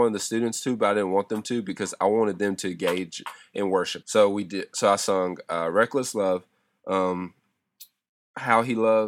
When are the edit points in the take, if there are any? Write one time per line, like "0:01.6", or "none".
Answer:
0:04.0